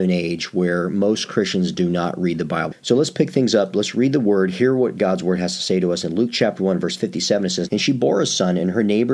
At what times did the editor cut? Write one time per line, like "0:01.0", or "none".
0:02.7
0:07.7

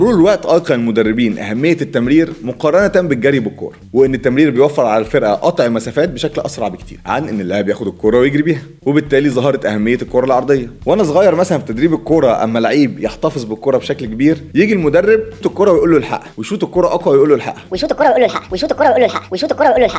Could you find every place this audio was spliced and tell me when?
0:15.4

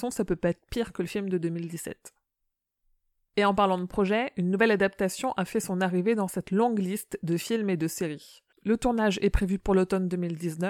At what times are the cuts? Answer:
0:08.5

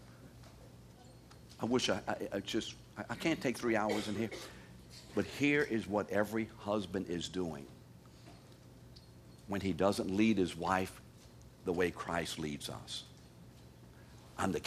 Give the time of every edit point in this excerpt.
none

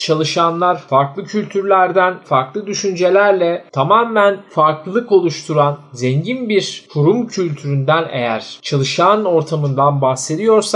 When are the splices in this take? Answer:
0:02.2

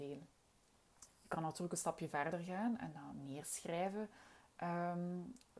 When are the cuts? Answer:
0:01.1

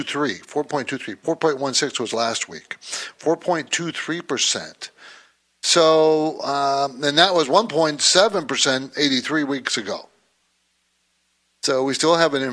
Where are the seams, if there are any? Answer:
none

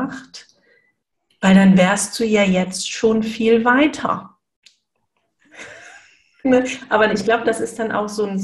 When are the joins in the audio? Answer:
none

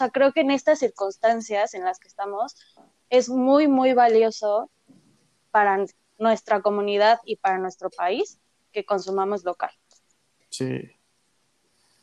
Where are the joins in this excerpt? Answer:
none

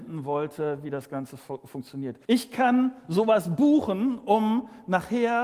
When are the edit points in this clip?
0:02.2

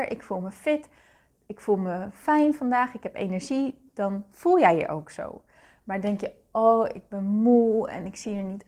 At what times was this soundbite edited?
none

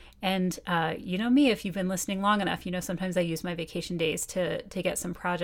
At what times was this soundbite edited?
none

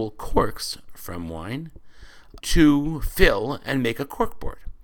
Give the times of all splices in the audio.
0:02.4

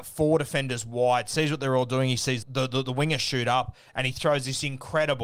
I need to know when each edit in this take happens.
0:02.4

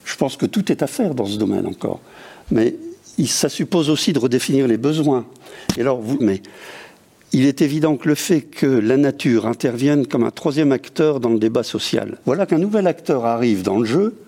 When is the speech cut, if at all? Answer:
0:06.2
0:12.2

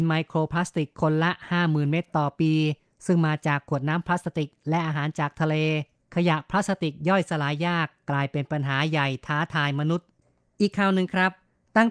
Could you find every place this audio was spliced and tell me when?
none

